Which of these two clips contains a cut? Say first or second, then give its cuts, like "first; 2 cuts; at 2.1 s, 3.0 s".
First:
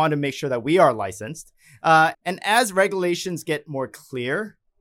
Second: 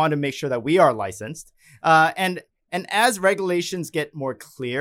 first; 1 cut; at 2.1 s